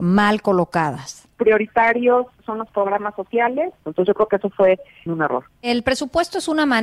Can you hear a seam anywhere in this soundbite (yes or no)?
yes